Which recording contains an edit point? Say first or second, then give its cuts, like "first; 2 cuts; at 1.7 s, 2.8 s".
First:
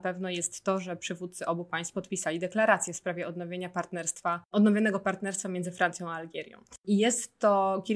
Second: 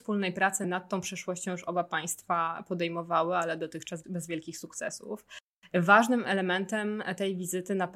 second; 1 cut; at 4.0 s